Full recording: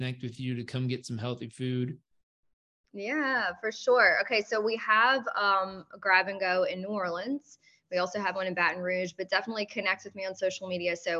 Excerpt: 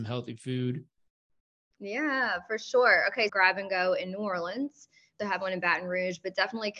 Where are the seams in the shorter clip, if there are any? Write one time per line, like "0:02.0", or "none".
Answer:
0:03.3
0:05.2